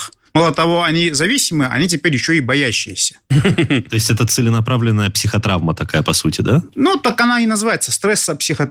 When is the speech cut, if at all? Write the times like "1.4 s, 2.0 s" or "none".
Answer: none